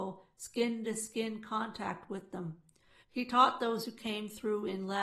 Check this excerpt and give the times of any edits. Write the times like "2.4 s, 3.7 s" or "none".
3.0 s